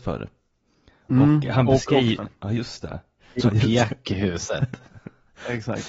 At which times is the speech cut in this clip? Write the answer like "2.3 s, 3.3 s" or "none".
2.2 s, 3.4 s